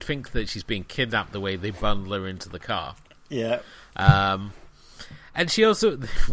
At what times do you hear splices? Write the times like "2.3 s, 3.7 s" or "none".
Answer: none